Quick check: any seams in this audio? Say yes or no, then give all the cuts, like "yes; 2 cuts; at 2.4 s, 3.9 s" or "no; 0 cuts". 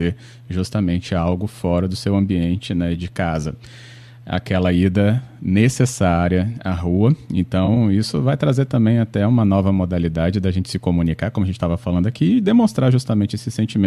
no; 0 cuts